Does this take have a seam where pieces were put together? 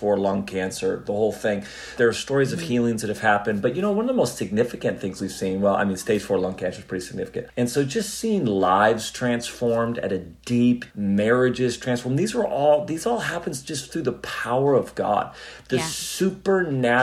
yes; 3 cuts; at 2.0 s, 7.5 s, 10.9 s

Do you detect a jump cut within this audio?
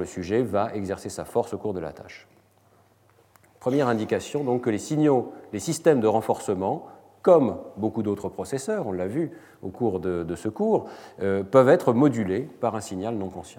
no; 0 cuts

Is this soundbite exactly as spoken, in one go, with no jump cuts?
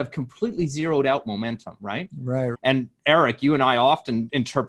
no; 1 cut; at 2.5 s

